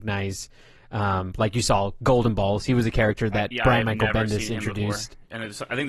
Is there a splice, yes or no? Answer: no